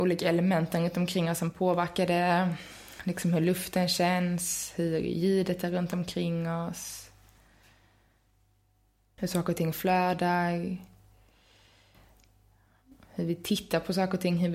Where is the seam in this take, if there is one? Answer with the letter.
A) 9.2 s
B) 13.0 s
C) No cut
A